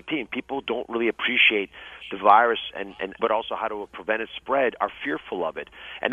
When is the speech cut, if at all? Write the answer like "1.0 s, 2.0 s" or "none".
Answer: 3.2 s